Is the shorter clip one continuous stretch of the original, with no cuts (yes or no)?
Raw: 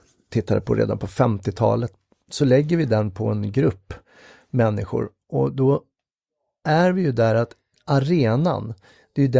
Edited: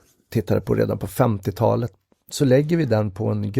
yes